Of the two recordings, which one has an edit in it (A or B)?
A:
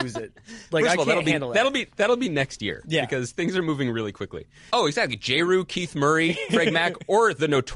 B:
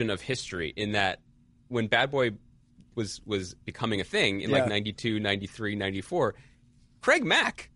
A